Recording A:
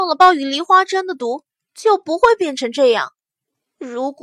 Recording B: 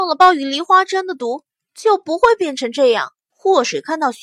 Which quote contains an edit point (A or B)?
B